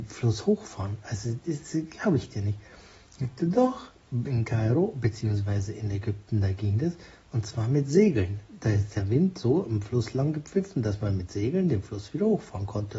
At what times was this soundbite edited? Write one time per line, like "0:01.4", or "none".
none

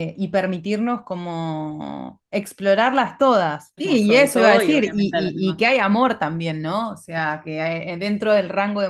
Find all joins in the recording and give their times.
0:03.8

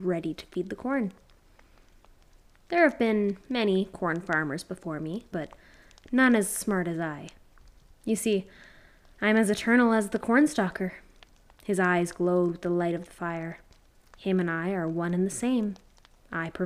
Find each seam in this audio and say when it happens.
0:05.3

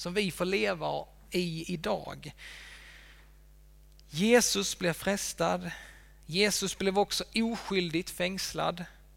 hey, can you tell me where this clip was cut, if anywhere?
none

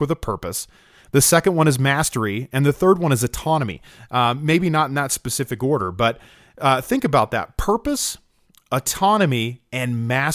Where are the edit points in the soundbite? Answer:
none

